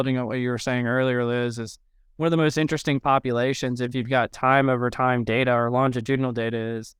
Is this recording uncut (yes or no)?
yes